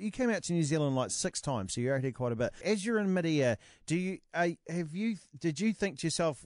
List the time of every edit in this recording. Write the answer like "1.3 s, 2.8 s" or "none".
2.6 s